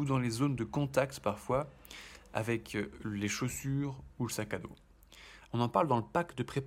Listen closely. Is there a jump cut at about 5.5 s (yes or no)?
yes